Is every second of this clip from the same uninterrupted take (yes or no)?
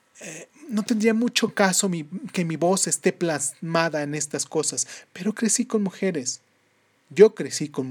no